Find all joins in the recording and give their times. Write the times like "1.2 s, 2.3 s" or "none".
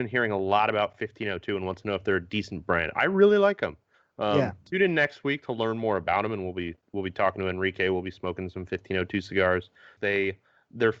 4.6 s, 10.0 s